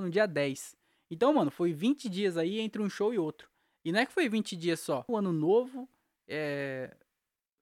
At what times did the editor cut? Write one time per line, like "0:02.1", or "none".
0:05.1